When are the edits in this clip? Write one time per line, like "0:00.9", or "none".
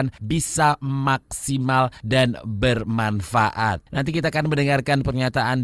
none

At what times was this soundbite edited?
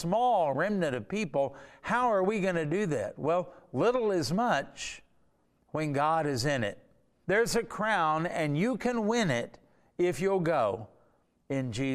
0:07.2

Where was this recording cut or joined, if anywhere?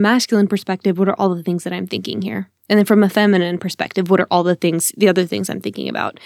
0:02.6

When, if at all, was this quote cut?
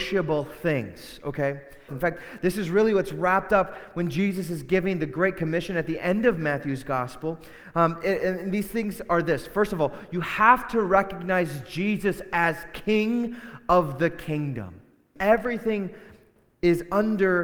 0:01.9
0:15.2

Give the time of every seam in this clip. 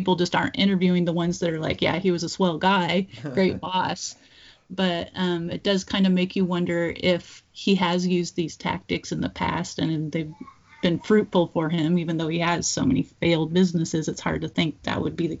none

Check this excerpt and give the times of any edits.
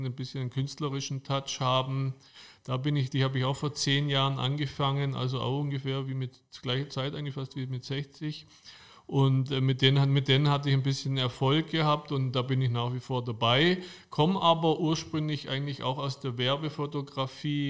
none

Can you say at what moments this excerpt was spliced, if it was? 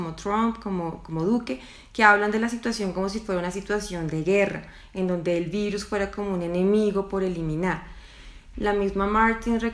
0:08.5

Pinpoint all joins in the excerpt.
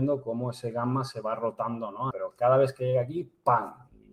0:02.1

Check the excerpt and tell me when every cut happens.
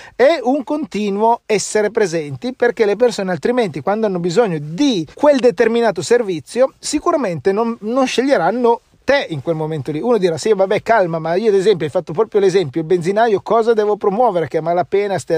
0:05.1

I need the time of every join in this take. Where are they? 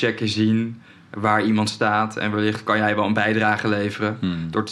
none

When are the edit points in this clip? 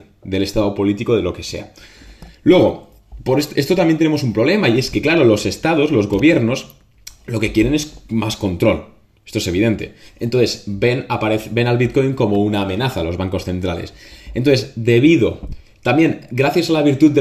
none

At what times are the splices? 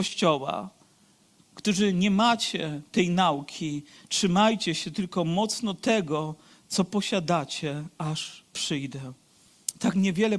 0:01.4

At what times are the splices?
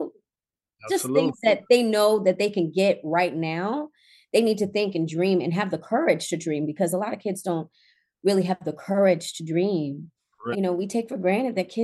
0:10.5

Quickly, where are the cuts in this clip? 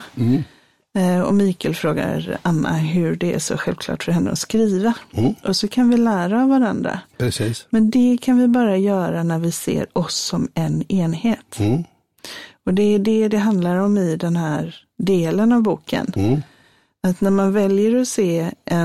none

